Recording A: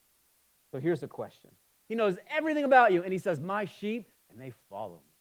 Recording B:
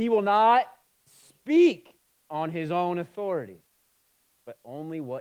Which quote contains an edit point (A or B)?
A